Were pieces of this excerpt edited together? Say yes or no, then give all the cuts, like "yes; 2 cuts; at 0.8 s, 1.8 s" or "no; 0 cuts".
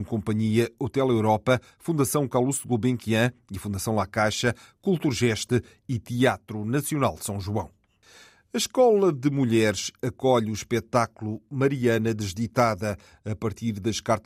no; 0 cuts